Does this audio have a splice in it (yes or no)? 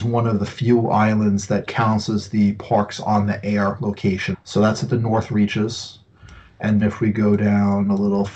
yes